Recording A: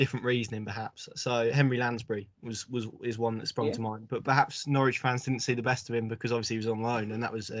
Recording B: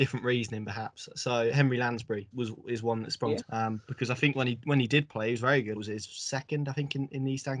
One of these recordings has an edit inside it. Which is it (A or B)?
B